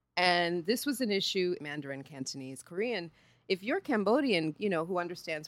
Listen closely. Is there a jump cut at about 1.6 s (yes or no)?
yes